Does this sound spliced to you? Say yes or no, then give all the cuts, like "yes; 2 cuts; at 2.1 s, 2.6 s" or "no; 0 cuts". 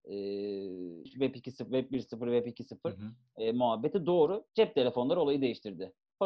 yes; 1 cut; at 1.1 s